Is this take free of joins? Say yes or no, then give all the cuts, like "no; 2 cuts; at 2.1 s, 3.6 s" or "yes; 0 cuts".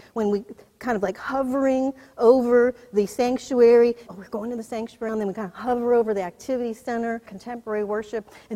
no; 3 cuts; at 4.1 s, 5.1 s, 7.3 s